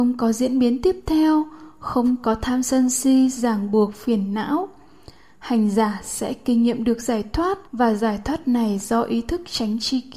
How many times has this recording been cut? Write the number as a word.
one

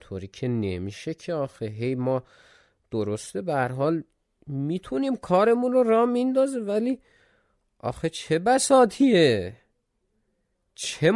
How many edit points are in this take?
zero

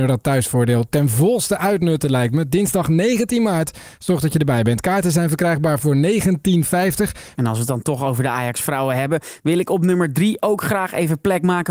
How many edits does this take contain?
one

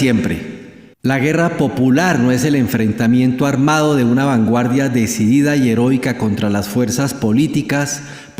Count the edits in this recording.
one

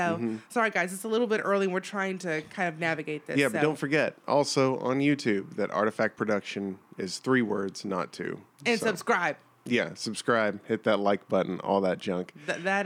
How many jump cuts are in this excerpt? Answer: zero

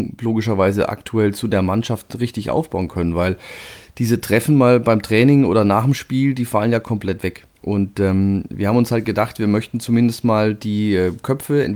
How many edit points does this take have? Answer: one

